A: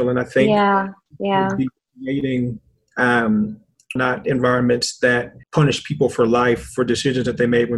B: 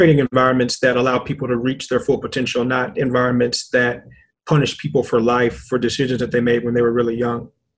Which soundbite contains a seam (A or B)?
A